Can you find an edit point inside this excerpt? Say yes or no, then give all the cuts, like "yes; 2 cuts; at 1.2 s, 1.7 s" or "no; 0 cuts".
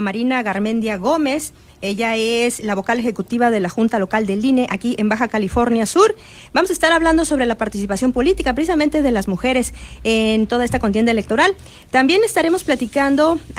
no; 0 cuts